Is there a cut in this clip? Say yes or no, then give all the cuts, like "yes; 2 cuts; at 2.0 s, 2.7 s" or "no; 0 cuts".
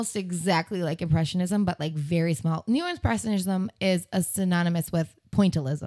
no; 0 cuts